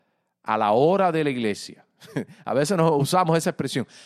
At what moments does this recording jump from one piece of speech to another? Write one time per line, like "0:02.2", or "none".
none